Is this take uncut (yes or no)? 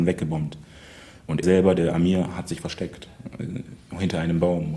no